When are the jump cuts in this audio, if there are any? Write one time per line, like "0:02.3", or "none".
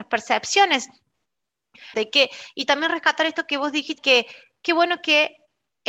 0:01.9
0:04.0